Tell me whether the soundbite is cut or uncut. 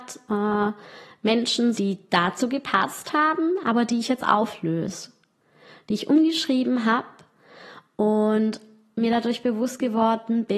cut